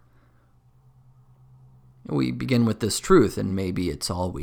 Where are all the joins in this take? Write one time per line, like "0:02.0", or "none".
none